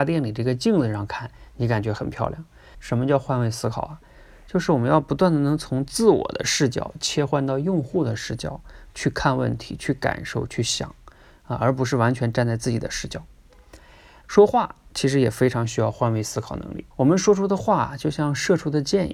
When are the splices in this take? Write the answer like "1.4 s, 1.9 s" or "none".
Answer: 2.7 s, 14.2 s, 16.9 s

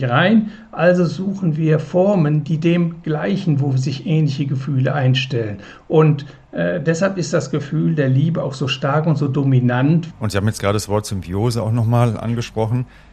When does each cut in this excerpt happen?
10.1 s

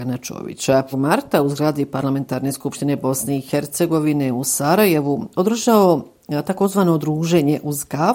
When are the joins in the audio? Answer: 0.9 s

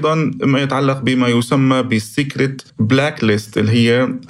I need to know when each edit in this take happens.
2.7 s

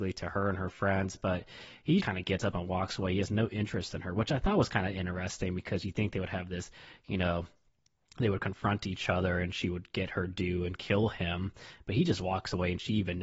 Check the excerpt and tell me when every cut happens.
2.0 s

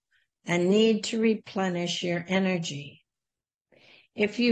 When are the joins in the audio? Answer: none

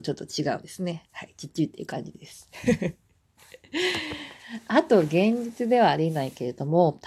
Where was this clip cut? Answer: none

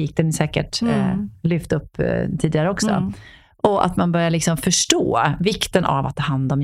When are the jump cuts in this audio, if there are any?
none

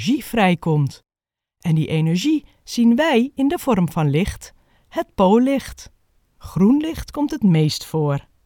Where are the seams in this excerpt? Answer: 6.3 s

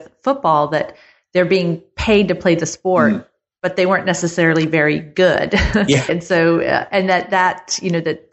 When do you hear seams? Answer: 6.1 s

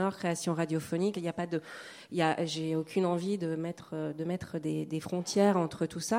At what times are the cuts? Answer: 1.1 s

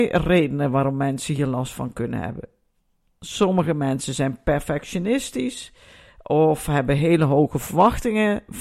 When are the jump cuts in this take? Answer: none

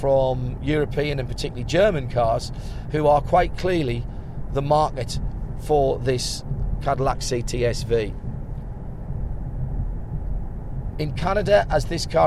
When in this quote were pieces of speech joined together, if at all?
10.9 s

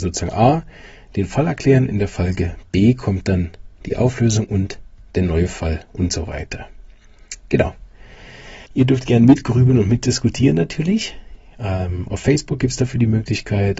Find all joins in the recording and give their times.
8.7 s

